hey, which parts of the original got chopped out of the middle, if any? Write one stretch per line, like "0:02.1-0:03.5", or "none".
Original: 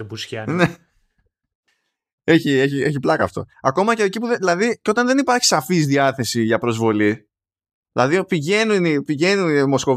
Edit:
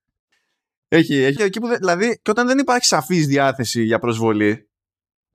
0:02.7-0:04.0